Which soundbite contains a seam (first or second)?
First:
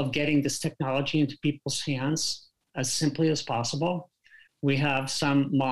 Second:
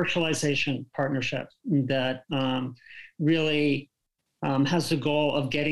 first